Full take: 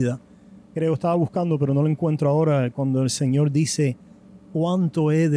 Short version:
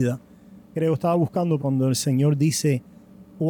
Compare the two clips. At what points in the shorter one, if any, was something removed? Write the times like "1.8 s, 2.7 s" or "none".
1.6 s